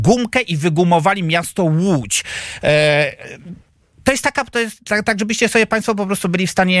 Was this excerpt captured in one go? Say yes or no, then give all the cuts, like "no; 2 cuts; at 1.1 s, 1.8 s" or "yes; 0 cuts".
yes; 0 cuts